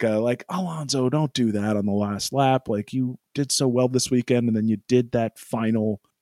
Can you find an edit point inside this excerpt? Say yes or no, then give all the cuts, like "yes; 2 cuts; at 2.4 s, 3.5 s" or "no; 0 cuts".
no; 0 cuts